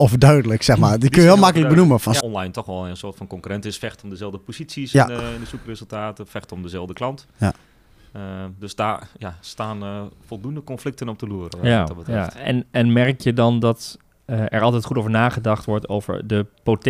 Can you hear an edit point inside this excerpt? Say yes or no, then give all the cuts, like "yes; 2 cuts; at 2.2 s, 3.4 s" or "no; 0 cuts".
yes; 1 cut; at 2.2 s